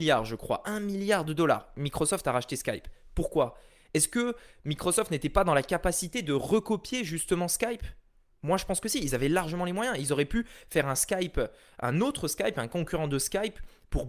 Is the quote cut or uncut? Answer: uncut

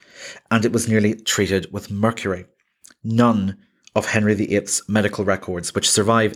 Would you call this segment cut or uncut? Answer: cut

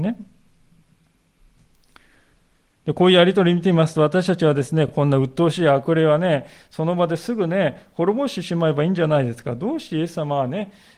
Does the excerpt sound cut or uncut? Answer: uncut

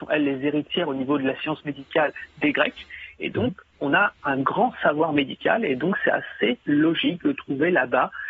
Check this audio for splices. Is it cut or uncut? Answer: uncut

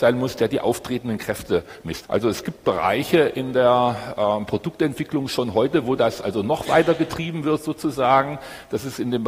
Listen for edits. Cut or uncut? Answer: cut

